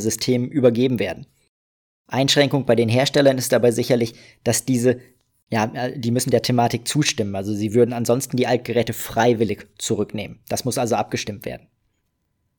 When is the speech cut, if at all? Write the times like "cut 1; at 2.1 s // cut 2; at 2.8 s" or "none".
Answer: none